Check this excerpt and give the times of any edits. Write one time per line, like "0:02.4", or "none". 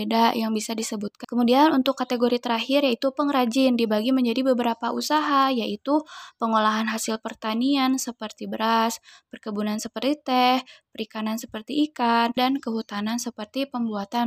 0:01.2
0:12.4